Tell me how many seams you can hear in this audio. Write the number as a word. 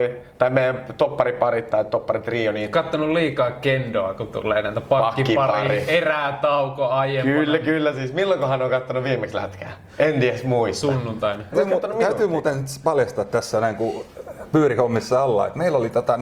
one